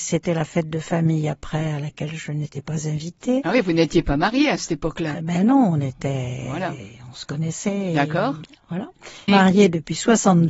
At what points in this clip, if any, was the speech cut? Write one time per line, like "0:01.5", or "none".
0:09.3